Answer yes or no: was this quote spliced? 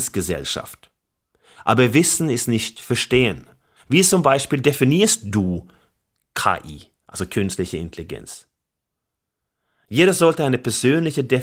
yes